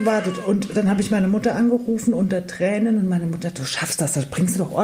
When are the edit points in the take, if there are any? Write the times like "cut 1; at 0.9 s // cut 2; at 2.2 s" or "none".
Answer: none